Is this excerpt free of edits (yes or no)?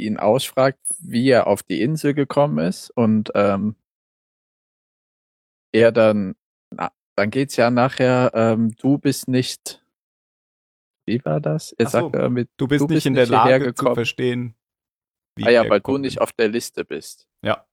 yes